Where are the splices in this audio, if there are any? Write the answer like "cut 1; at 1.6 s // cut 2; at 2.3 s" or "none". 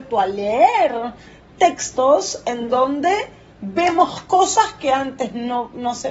none